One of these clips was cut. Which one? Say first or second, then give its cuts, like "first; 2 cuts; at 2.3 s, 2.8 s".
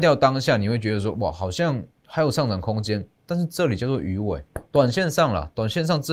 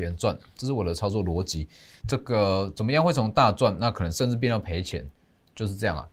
second; 1 cut; at 2.0 s